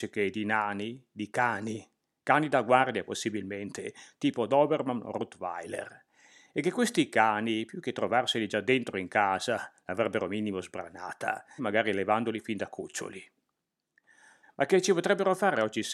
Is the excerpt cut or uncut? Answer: cut